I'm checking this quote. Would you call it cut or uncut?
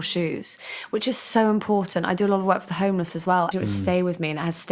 cut